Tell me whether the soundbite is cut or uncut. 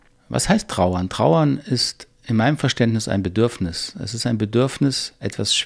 uncut